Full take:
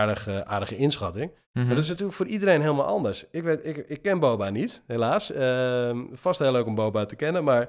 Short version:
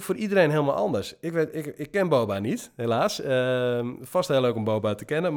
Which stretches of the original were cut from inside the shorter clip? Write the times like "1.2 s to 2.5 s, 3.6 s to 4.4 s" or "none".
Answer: none